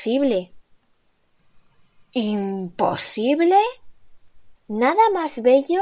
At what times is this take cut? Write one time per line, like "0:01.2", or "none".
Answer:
0:04.6

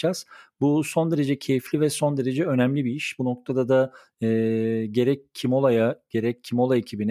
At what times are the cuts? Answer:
none

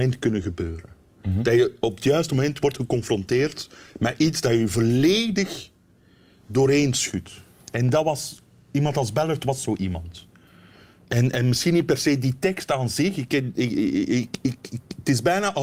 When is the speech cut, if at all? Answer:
none

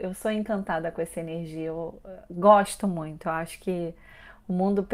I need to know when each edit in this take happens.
none

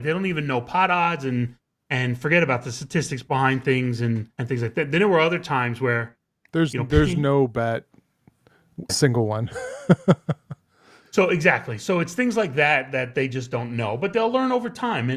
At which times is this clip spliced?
0:04.3
0:08.9

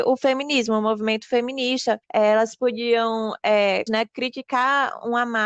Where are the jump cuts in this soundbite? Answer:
0:02.0
0:03.9

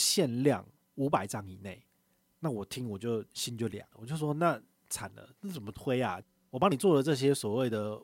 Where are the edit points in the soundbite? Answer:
none

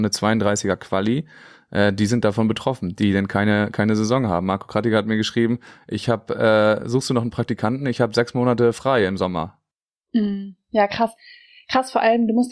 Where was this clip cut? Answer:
none

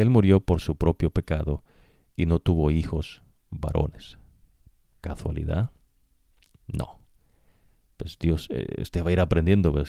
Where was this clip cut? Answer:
none

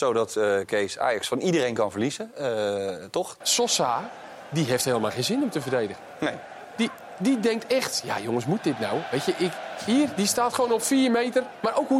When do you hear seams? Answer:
0:03.4

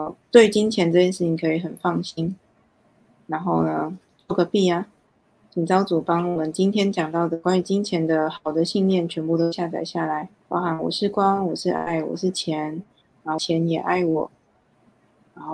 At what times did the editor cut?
0:10.4
0:13.4

